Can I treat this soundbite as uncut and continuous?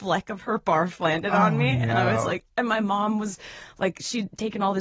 yes; 0 cuts

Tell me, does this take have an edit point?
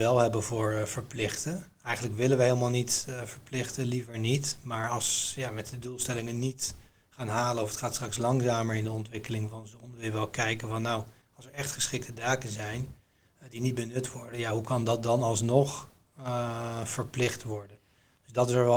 no; 0 cuts

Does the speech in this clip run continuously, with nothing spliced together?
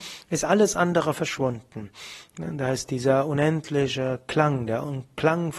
yes; 0 cuts

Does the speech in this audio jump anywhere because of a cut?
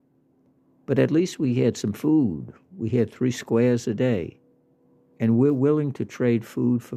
no; 0 cuts

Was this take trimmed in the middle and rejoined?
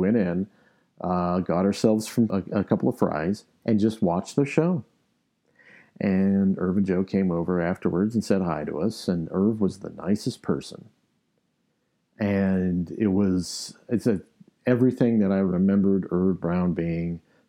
yes; 1 cut; at 2.3 s

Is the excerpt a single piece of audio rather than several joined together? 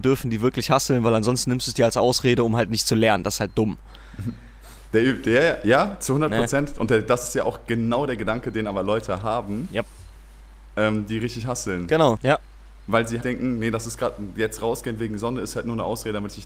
no; 2 cuts; at 12.2 s, 13.2 s

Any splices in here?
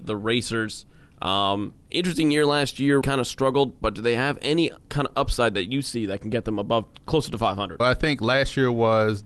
yes; 3 cuts; at 1.8 s, 3.0 s, 7.8 s

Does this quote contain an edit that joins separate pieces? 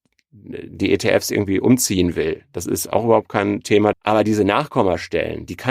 yes; 1 cut; at 3.9 s

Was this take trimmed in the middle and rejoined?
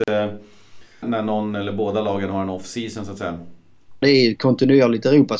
yes; 2 cuts; at 1.0 s, 4.0 s

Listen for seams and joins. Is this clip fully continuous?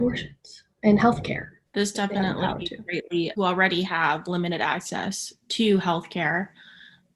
no; 2 cuts; at 1.7 s, 3.3 s

